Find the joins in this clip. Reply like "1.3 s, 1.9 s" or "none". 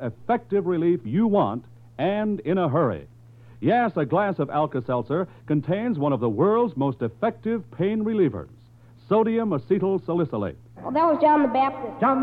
10.8 s